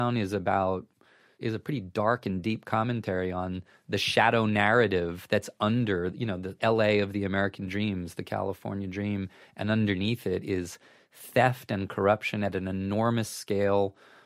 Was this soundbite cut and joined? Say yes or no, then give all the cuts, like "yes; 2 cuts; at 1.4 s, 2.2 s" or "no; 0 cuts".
yes; 1 cut; at 8.1 s